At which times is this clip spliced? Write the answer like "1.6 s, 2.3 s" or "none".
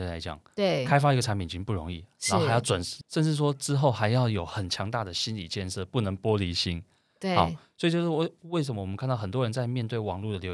3.0 s